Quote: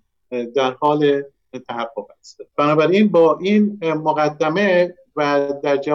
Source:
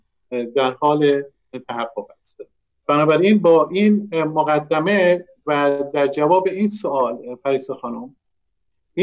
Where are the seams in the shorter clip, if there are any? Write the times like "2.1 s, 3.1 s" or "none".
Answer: 2.5 s